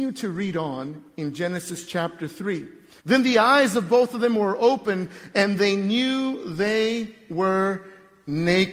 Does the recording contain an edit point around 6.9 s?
no; 1 cut; at 3.0 s

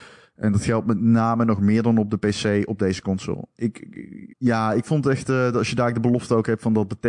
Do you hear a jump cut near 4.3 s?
yes; 1 cut; at 4.3 s

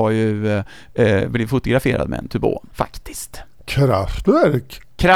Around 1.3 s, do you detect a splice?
no; 0 cuts

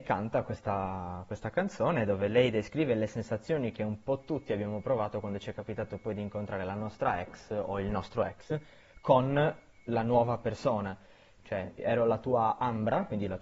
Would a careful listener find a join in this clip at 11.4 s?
yes; 1 cut; at 11.4 s

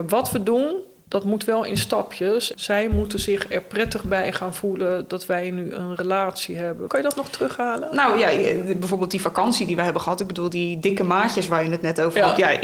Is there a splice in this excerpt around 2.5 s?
yes; 2 cuts; at 2.5 s, 6.9 s

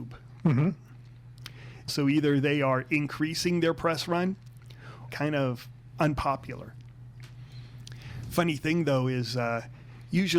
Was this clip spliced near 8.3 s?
no; 2 cuts; at 1.9 s, 5.1 s

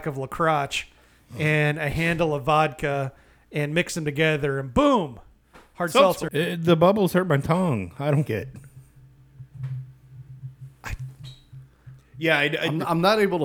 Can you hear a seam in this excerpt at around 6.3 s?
yes; 2 cuts; at 6.3 s, 8.3 s

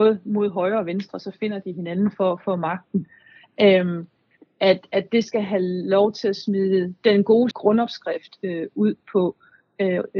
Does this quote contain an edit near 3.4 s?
no; 1 cut; at 7.5 s

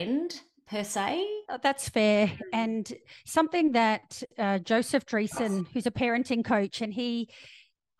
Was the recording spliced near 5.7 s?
no; 1 cut; at 1.4 s

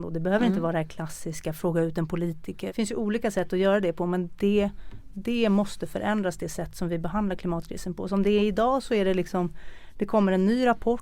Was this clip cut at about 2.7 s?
yes; 1 cut; at 2.7 s

